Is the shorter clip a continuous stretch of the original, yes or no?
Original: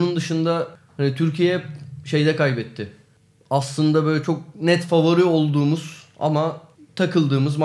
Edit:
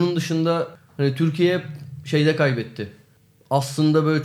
yes